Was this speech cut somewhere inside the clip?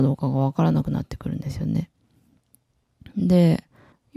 no; 0 cuts

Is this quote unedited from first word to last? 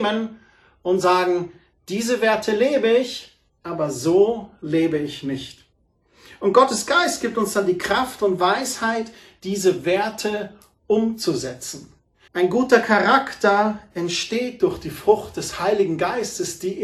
no; 1 cut; at 12.3 s

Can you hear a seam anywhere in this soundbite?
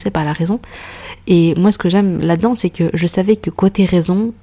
no; 0 cuts

